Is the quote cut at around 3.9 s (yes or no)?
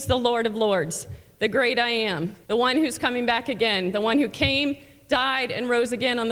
no